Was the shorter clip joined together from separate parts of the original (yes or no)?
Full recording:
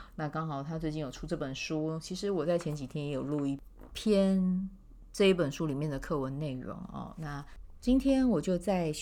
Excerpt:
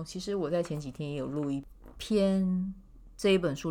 no